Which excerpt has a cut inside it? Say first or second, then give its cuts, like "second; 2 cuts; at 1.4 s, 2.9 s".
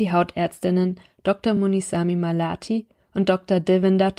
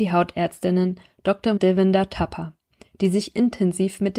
second; 1 cut; at 1.6 s